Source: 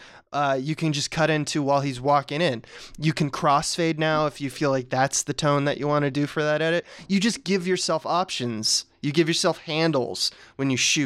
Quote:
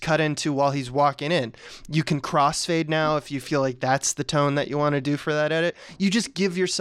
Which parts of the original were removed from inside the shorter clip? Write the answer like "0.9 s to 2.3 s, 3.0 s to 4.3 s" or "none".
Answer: none